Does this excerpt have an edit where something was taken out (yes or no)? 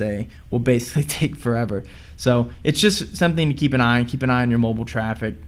no